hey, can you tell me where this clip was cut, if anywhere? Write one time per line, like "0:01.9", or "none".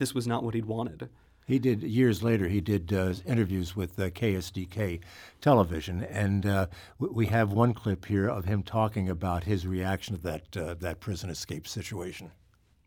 none